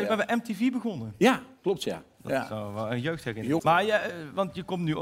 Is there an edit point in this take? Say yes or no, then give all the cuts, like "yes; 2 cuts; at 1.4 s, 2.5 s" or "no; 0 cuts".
yes; 2 cuts; at 2.1 s, 3.6 s